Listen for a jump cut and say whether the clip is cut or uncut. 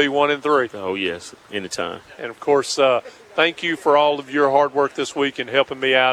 uncut